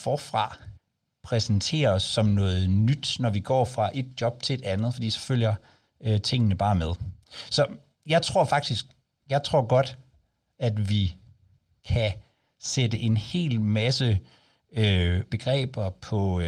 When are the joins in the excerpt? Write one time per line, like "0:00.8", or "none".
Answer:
0:15.3